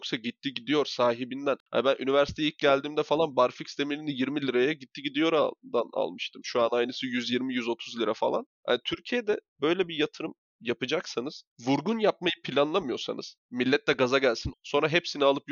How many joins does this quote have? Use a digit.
2